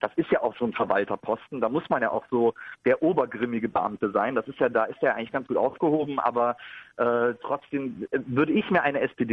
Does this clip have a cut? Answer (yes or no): no